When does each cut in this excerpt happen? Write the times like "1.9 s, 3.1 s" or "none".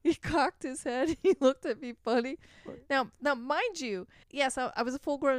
4.2 s